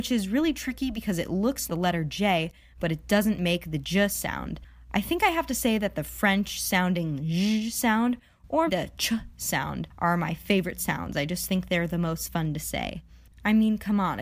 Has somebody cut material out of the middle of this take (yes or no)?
yes